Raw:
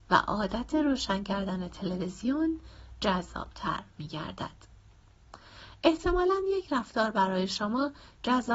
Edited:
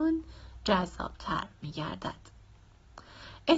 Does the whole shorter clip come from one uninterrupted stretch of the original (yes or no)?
yes